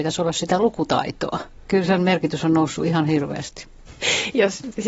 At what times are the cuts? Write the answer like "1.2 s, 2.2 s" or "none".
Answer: 3.9 s